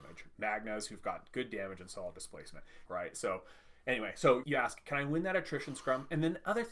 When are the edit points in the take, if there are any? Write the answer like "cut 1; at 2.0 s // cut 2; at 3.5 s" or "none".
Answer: cut 1; at 2.9 s // cut 2; at 4.4 s